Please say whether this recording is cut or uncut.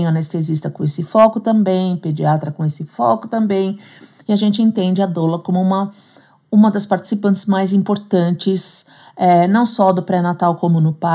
cut